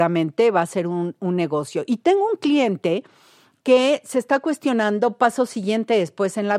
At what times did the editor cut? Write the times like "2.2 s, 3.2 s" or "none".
none

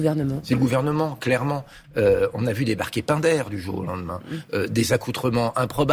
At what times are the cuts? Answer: 1.8 s

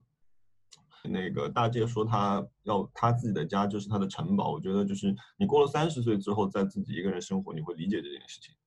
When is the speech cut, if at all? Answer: 1.0 s

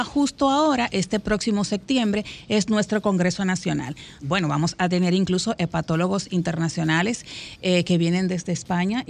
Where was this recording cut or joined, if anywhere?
4.2 s

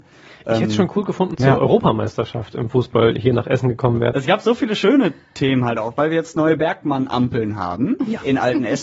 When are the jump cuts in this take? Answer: 1.3 s, 4.1 s

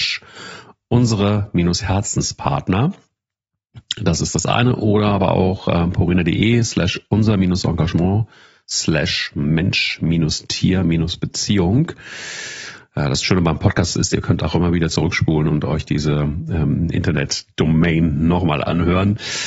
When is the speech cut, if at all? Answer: none

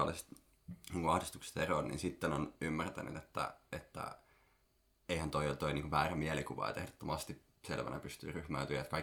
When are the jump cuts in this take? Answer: none

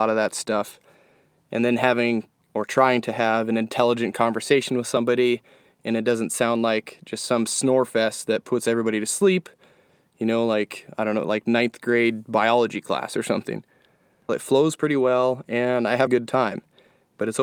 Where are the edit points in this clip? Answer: 14.3 s, 16.1 s

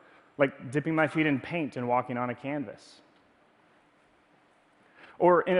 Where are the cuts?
none

